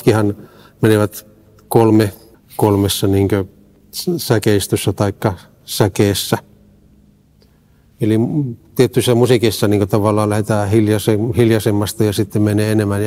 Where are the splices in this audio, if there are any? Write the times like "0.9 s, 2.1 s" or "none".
2.3 s, 7.9 s